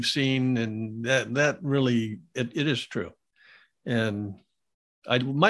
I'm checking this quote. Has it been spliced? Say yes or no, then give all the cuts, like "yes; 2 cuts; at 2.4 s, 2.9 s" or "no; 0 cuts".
no; 0 cuts